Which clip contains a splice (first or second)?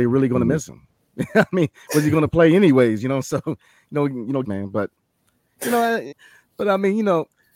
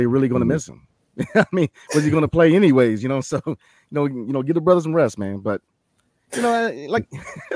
first